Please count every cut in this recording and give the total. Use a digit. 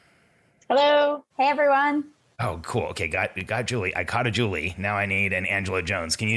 1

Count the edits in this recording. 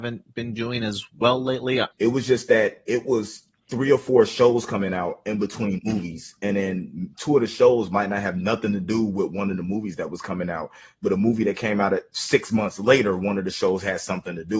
1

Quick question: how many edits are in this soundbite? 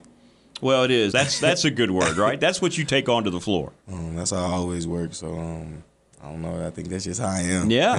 2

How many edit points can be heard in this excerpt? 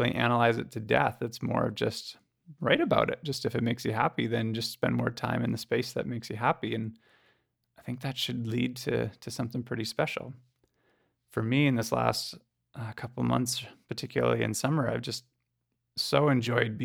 0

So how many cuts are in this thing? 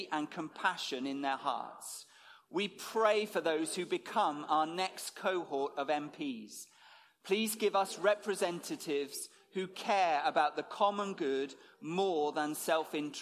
2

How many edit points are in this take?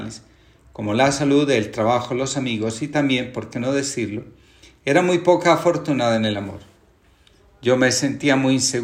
0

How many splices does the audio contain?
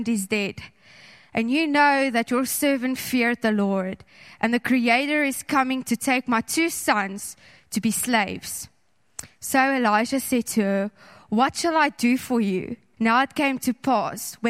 1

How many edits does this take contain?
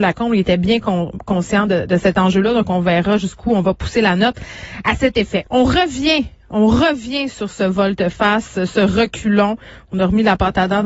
1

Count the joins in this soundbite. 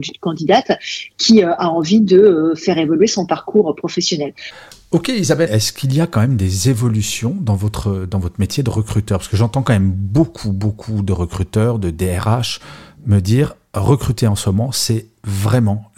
1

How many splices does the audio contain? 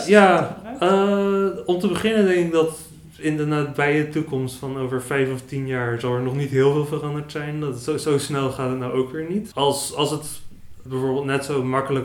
1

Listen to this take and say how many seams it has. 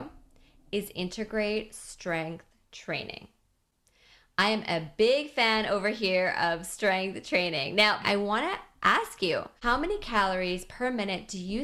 2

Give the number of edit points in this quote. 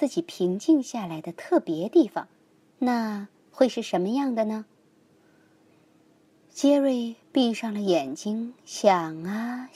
0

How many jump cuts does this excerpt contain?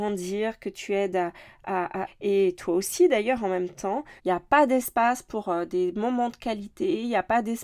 2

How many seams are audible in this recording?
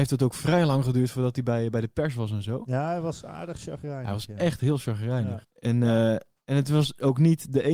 1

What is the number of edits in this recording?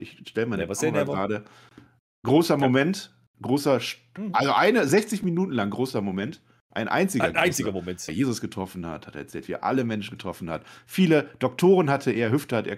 1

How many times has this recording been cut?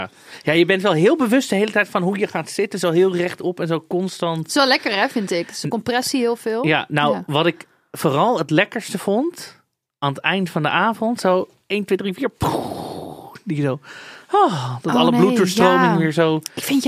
0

